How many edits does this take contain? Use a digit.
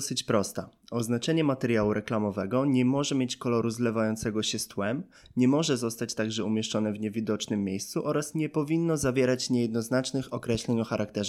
0